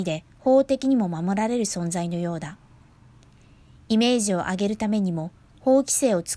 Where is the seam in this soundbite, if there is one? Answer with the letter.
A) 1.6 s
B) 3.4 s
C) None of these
C